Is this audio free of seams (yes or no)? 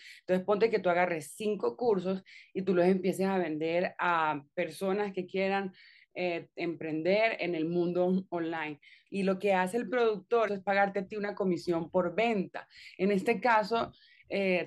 no